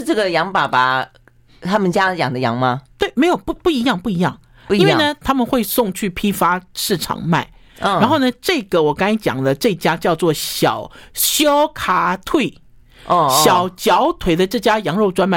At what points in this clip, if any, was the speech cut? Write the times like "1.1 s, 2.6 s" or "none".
3.6 s, 5.2 s